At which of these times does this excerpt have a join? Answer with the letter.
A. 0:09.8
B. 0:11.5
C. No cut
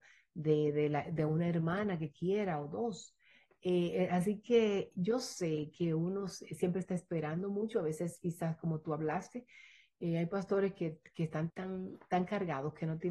B